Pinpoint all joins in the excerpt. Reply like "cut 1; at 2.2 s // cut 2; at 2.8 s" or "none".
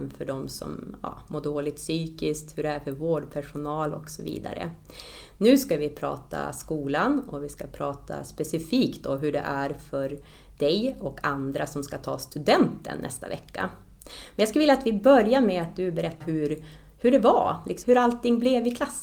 cut 1; at 16.2 s // cut 2; at 17.8 s